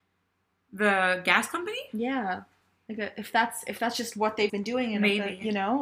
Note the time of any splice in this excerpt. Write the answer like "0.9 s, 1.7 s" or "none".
4.5 s